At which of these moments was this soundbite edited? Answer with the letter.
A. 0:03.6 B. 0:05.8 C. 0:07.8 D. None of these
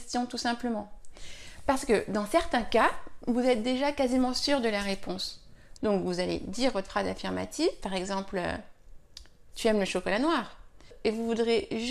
B